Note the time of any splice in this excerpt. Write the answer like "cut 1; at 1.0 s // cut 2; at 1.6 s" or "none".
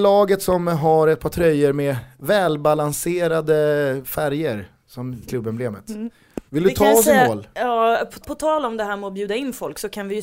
cut 1; at 5.2 s // cut 2; at 6.5 s // cut 3; at 8.2 s